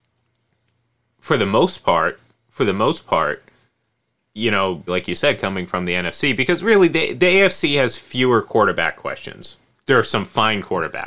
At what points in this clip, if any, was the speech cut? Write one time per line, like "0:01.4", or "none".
0:04.9
0:09.7